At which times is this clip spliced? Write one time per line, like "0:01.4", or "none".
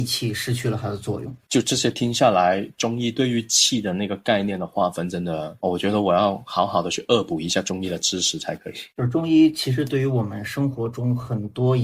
0:05.6